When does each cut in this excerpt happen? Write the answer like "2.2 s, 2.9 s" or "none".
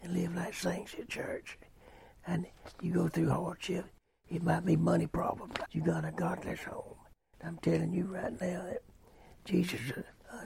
2.2 s, 5.6 s, 7.3 s